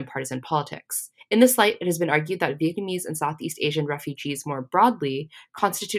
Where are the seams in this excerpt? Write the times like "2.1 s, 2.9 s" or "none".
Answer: 1.2 s